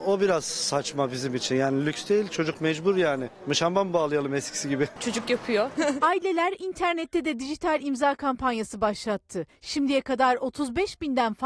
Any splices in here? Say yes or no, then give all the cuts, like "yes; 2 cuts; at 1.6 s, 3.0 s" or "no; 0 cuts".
yes; 1 cut; at 5.8 s